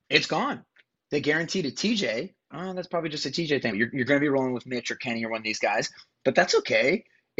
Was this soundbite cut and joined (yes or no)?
yes